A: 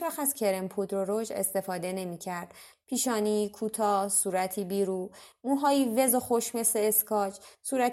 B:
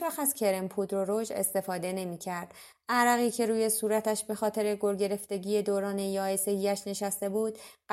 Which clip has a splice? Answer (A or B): A